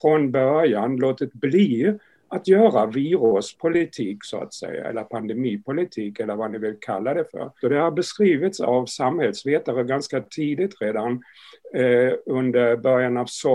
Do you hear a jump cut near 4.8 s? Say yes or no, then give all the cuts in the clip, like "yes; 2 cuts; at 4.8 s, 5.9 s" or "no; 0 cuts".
no; 1 cut; at 7.6 s